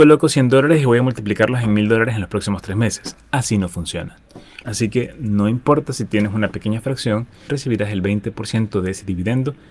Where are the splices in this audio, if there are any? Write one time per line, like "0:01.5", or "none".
0:04.6
0:07.5